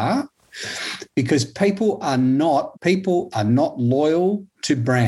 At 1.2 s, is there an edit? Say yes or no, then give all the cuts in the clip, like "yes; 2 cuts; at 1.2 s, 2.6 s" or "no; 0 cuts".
no; 1 cut; at 2.7 s